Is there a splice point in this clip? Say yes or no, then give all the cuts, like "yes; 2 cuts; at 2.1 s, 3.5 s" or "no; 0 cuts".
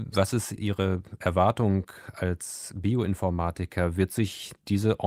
no; 0 cuts